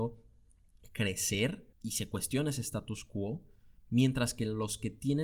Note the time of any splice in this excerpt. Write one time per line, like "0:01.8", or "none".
0:01.7